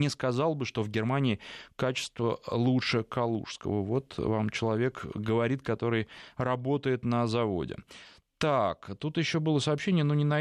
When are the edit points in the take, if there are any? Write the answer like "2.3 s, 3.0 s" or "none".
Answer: none